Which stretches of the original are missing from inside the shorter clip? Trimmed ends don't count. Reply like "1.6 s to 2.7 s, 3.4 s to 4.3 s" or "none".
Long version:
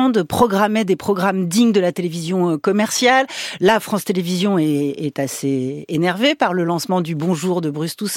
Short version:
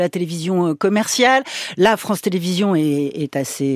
none